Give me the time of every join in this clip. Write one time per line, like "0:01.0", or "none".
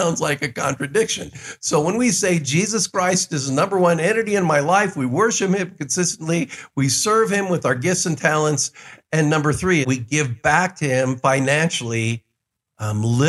0:09.8